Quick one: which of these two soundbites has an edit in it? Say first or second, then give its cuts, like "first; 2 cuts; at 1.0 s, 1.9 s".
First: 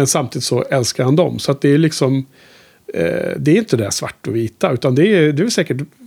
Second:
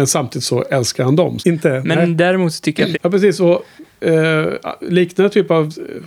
second; 2 cuts; at 1.4 s, 2.9 s